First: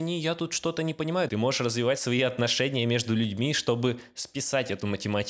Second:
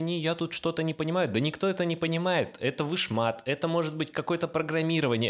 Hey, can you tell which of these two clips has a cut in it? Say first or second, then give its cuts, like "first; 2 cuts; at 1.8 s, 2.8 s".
first; 1 cut; at 1.3 s